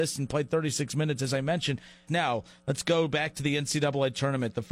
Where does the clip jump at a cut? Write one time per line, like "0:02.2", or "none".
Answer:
0:02.1

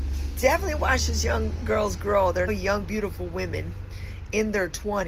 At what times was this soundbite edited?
0:02.5

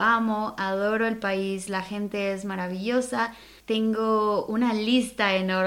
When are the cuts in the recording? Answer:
0:03.6

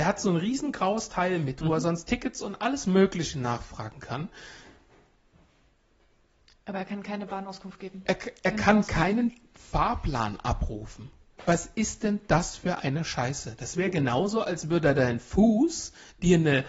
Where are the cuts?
none

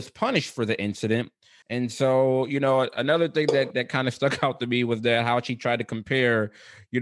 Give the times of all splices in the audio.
0:01.6

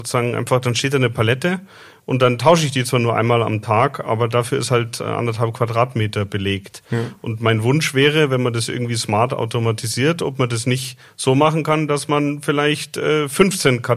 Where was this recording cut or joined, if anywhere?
none

